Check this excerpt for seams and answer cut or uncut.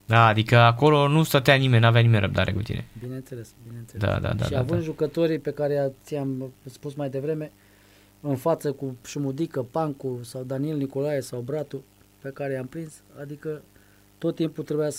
uncut